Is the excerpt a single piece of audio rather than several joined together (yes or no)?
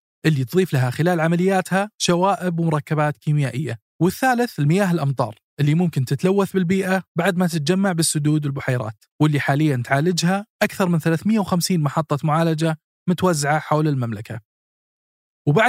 no